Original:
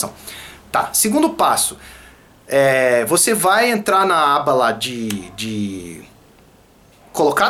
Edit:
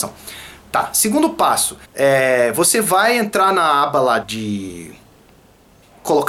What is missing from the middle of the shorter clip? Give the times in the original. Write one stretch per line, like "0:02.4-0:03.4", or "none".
0:01.8-0:02.4
0:04.7-0:05.3

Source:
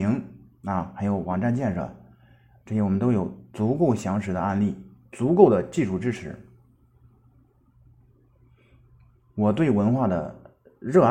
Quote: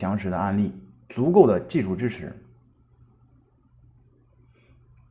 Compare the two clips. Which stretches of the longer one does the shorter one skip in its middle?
none

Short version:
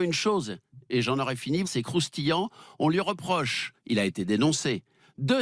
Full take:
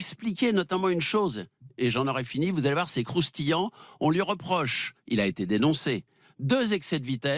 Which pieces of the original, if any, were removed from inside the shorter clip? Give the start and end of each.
0:02.5-0:02.9

